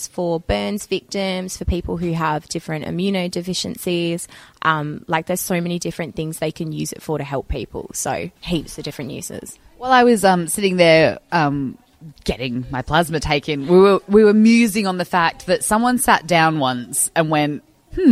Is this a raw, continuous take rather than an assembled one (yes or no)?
no